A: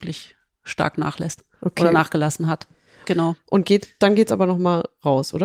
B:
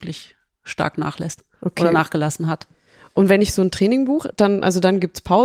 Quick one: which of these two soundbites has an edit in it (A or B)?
A